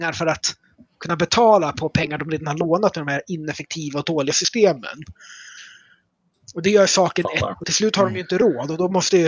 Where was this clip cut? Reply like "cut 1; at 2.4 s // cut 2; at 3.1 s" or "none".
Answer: cut 1; at 7.5 s